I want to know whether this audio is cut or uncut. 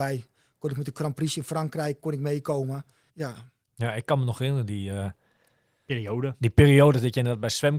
cut